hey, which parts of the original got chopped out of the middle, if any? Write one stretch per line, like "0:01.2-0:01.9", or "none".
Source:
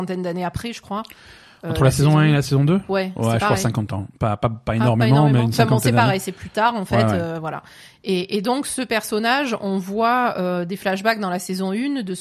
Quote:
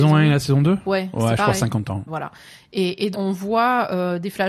0:04.1-0:07.4
0:08.4-0:09.6